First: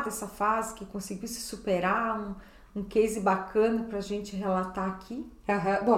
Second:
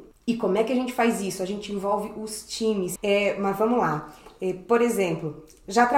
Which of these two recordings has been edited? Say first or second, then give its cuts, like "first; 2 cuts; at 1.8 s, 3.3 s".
second; 1 cut; at 3.0 s